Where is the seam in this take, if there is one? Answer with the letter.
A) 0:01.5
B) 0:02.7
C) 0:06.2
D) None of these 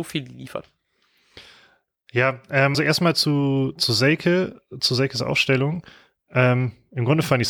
B